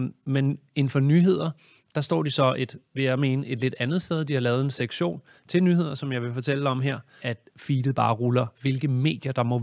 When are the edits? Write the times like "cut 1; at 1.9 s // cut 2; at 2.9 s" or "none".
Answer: cut 1; at 7.2 s // cut 2; at 8.5 s